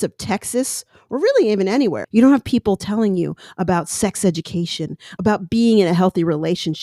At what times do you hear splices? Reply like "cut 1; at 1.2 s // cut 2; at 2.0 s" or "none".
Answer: cut 1; at 2.0 s // cut 2; at 5.2 s